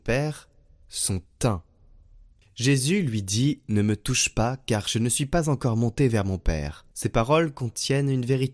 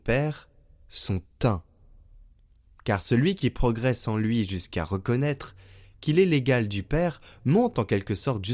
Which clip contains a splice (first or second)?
first